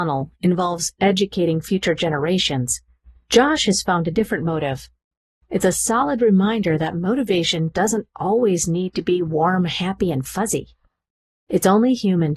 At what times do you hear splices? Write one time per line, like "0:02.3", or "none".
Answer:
0:05.4